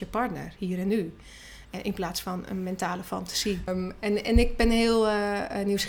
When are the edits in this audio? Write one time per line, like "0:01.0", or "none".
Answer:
0:03.7